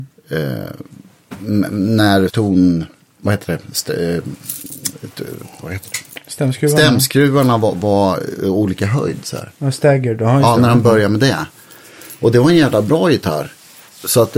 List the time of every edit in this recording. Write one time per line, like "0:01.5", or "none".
0:02.3